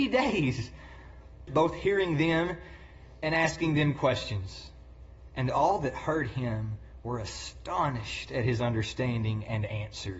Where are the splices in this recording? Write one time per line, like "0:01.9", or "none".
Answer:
0:01.5